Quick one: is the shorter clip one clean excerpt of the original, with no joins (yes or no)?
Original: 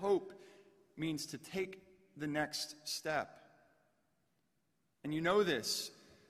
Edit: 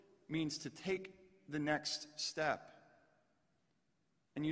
yes